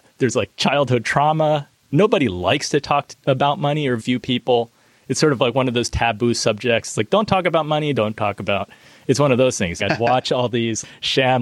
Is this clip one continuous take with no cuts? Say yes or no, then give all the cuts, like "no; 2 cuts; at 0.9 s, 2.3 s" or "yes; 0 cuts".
no; 3 cuts; at 4.0 s, 7.9 s, 9.8 s